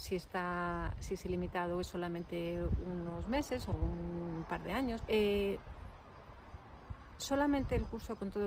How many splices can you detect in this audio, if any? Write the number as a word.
two